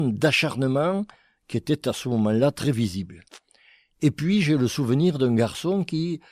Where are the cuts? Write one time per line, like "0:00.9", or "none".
none